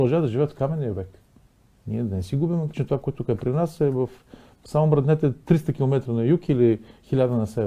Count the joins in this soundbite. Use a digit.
1